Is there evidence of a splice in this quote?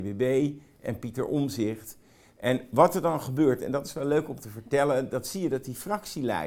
no; 0 cuts

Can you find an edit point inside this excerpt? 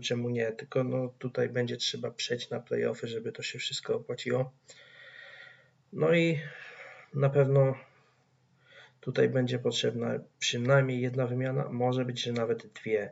no; 0 cuts

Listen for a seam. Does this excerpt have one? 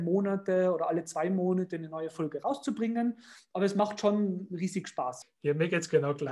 yes; 1 cut; at 5.2 s

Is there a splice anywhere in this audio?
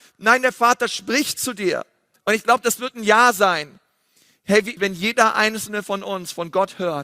yes; 2 cuts; at 2.1 s, 4.8 s

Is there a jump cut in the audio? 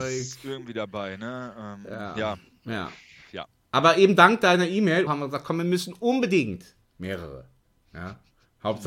yes; 2 cuts; at 5.1 s, 6.8 s

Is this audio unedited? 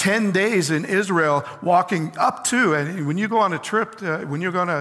yes; 0 cuts

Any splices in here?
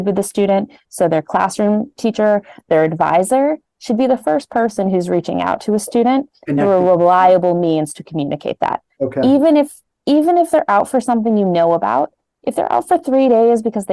no; 0 cuts

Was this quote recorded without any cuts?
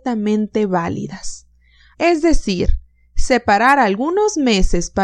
no; 1 cut; at 1.9 s

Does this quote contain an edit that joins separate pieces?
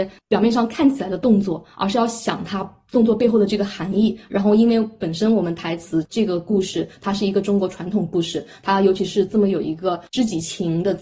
no; 0 cuts

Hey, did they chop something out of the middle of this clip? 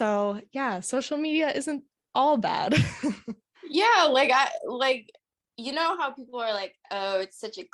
no; 0 cuts

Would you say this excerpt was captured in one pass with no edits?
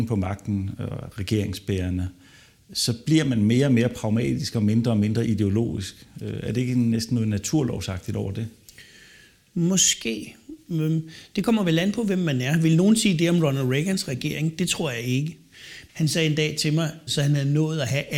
no; 2 cuts; at 15.9 s, 17.1 s

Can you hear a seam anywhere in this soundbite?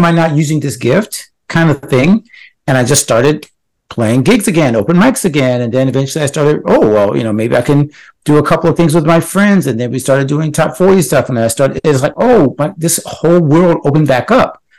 no; 0 cuts

